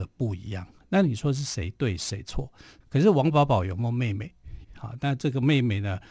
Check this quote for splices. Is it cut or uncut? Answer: cut